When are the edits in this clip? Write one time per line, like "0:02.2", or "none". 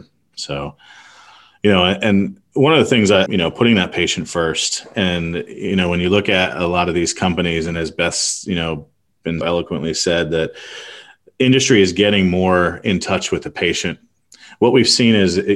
0:03.3
0:09.4